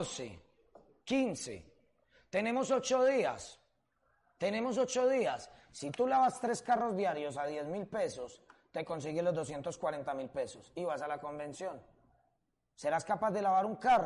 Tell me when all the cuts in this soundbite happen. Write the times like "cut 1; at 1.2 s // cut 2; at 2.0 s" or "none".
none